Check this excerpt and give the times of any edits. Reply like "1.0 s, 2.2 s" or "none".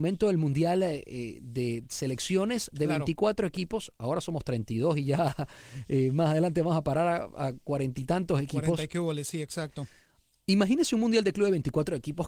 none